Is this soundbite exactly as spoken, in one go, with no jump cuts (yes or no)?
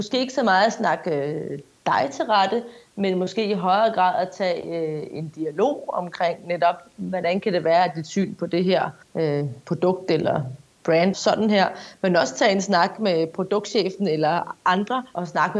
no